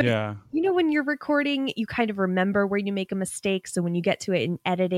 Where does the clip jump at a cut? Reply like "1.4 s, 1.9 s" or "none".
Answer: none

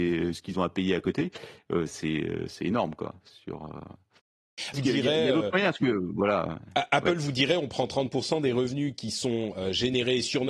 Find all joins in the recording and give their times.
4.7 s

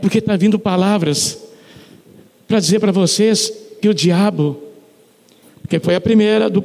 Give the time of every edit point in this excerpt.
5.4 s

